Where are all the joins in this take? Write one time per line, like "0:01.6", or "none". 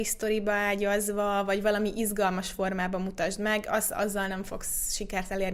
none